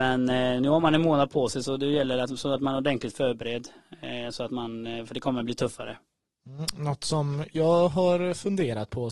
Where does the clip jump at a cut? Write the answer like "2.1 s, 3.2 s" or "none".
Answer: none